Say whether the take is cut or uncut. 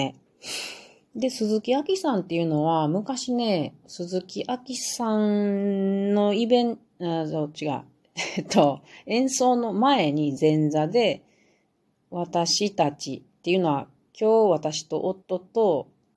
cut